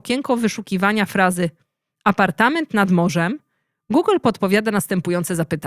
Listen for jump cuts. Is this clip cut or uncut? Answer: uncut